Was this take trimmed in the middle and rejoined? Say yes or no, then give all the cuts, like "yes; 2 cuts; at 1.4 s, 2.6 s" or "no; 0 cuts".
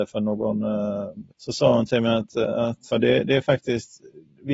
yes; 2 cuts; at 1.3 s, 2.9 s